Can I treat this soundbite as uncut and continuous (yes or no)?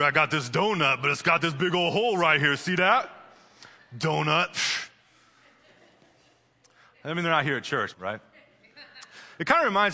no